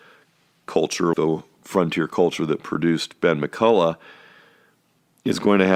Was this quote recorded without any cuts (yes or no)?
no